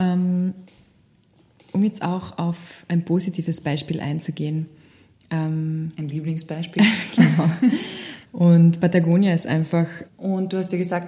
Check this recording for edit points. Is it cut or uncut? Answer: cut